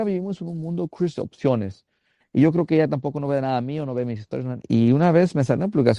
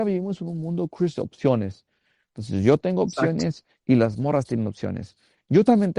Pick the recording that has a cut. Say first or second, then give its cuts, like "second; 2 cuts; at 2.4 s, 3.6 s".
first; 2 cuts; at 2.2 s, 4.6 s